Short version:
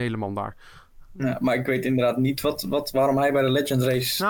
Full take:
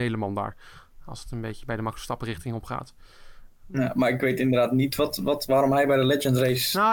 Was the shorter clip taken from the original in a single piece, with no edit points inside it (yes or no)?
no